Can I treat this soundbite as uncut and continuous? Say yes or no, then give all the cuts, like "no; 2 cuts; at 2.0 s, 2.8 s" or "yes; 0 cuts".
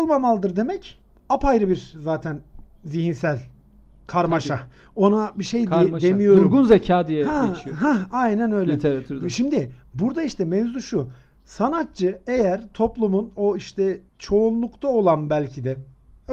no; 1 cut; at 14.1 s